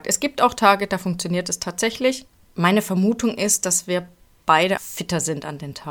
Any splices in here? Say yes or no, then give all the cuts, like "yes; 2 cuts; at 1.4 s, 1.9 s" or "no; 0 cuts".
yes; 2 cuts; at 2.4 s, 4.8 s